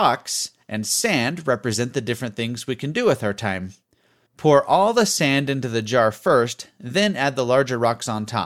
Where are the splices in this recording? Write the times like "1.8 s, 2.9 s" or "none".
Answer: 4.3 s